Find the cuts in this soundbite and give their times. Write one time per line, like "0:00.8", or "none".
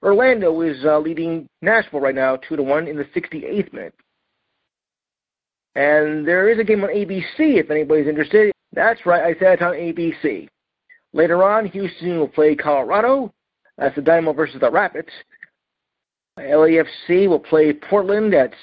0:08.5